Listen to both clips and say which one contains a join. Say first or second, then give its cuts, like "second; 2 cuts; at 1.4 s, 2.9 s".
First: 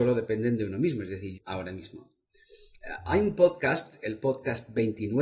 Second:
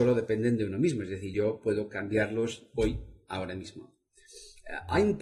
first; 1 cut; at 1.3 s